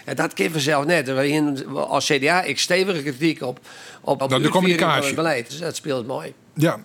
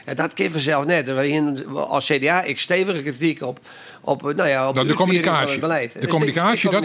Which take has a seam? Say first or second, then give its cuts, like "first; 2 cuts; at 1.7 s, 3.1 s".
first; 2 cuts; at 4.2 s, 5.5 s